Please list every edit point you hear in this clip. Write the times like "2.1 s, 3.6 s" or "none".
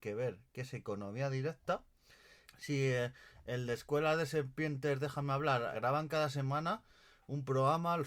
2.4 s, 5.7 s